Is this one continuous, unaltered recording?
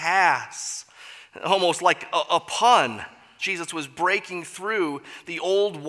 no; 1 cut; at 3.4 s

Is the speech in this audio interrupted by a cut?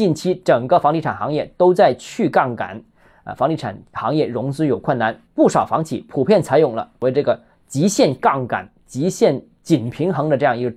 yes; 1 cut; at 5.3 s

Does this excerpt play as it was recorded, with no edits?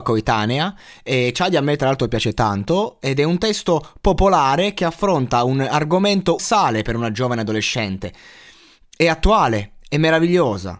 no; 1 cut; at 6.4 s

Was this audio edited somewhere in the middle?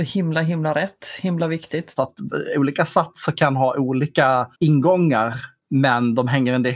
yes; 2 cuts; at 2.0 s, 4.5 s

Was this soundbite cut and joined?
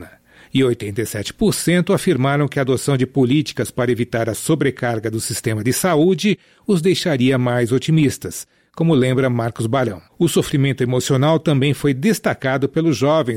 yes; 1 cut; at 10.1 s

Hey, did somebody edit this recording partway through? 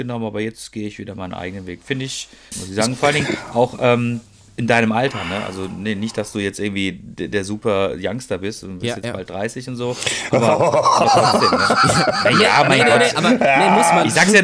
yes; 1 cut; at 2.5 s

